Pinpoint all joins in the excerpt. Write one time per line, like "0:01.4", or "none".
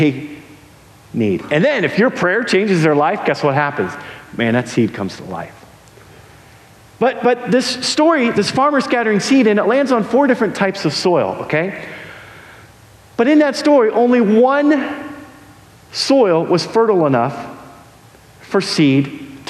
none